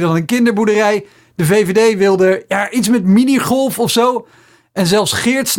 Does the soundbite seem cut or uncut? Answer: uncut